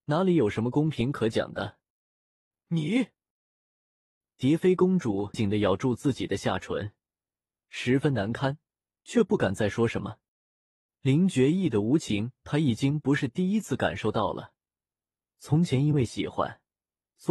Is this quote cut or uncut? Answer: cut